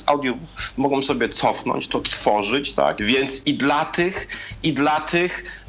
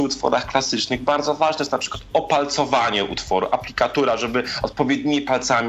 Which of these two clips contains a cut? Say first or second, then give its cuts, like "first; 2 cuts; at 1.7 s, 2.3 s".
first; 2 cuts; at 1.9 s, 3.0 s